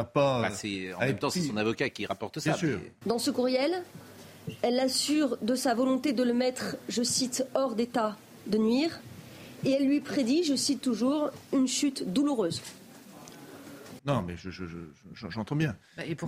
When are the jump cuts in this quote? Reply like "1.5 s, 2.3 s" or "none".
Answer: 3.0 s, 14.0 s